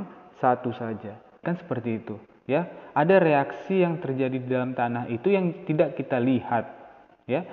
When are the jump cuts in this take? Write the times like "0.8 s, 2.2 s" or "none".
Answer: 1.4 s